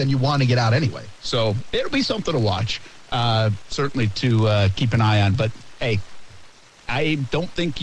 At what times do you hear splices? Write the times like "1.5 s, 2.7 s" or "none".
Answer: none